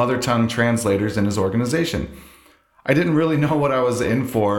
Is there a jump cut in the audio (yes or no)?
no